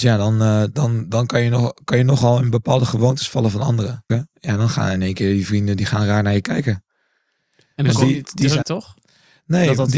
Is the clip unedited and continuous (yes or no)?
no